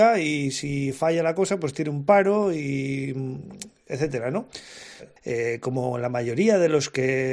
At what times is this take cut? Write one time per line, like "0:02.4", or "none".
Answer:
0:05.2